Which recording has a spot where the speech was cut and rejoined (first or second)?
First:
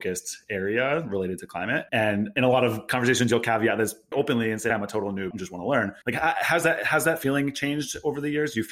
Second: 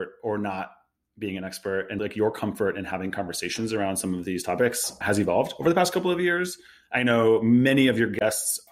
first